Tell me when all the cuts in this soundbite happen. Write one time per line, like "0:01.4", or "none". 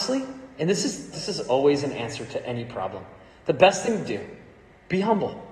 0:01.1